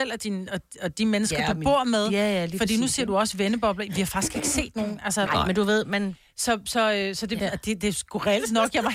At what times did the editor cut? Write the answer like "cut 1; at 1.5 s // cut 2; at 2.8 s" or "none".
cut 1; at 5.3 s // cut 2; at 7.4 s